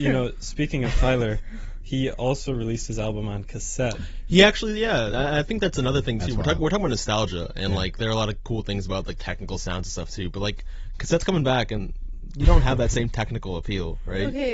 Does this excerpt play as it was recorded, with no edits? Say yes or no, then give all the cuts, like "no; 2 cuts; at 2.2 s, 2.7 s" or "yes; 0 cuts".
yes; 0 cuts